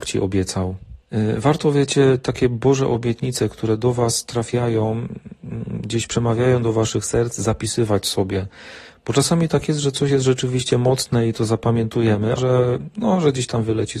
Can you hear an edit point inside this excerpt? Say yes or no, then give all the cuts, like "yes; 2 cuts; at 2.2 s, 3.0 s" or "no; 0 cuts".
yes; 1 cut; at 12.4 s